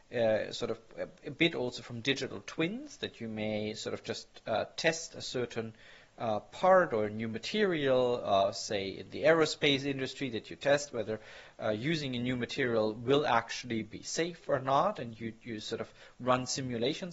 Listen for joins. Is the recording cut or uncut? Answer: uncut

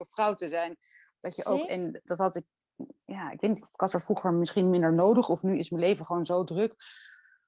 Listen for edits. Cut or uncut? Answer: cut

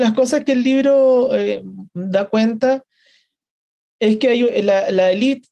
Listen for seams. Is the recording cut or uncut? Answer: uncut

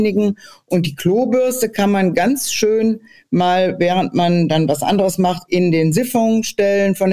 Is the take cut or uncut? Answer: uncut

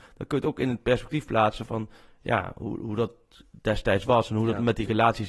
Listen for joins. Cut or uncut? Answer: uncut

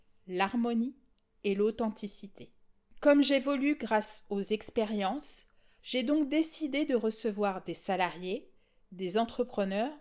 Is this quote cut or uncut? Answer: cut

